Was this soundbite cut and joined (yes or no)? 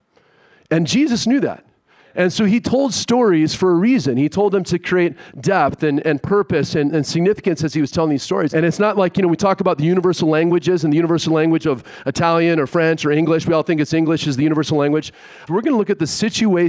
yes